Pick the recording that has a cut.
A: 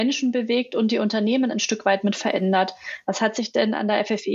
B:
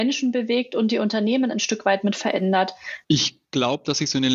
B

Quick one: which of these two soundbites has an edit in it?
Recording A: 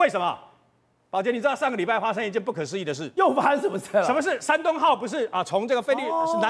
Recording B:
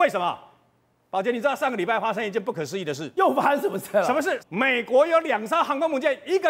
B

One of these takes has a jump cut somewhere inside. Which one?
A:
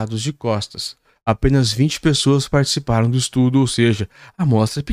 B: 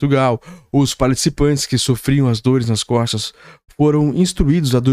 A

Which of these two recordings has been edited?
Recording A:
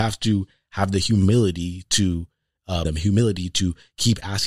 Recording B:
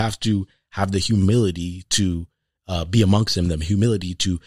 A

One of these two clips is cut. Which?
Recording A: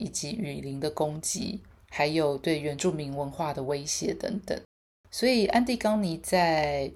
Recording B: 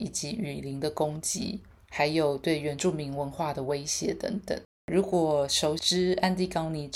B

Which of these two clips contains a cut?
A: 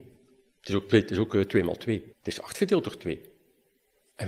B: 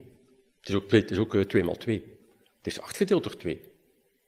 A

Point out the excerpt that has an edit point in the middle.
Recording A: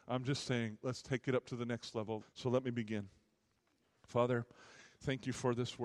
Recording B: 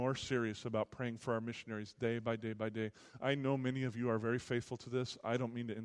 A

